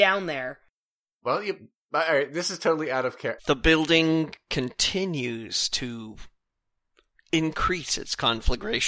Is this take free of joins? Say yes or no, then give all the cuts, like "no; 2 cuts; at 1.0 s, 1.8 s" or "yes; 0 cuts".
no; 1 cut; at 3.4 s